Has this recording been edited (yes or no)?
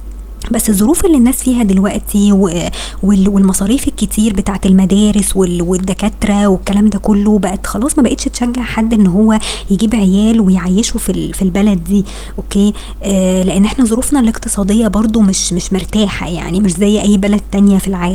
no